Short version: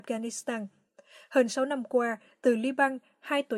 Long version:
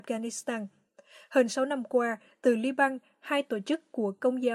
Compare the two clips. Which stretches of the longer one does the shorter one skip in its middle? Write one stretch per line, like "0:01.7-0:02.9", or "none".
none